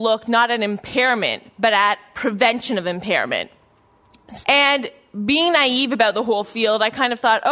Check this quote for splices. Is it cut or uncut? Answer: cut